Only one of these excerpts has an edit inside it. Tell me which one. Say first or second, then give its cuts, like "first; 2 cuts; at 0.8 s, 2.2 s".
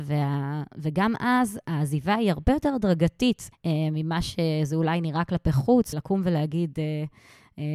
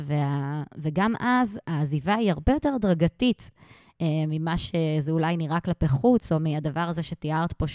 first; 2 cuts; at 3.5 s, 5.9 s